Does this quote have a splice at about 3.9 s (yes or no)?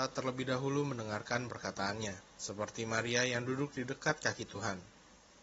no